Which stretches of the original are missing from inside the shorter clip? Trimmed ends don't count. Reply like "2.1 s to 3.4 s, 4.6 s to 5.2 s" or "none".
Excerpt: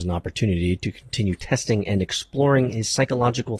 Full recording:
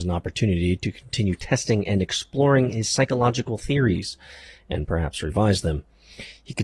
none